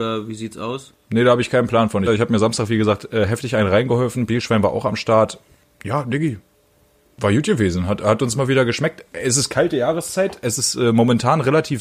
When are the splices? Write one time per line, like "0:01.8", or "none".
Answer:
0:02.1